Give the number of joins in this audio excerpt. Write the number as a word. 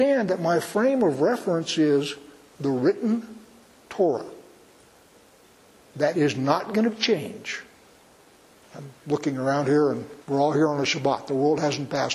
two